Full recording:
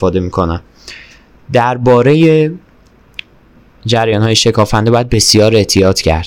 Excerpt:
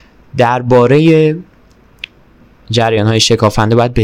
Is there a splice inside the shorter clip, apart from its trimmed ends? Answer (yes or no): no